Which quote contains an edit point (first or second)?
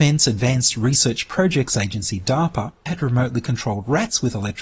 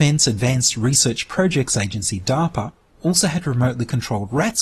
first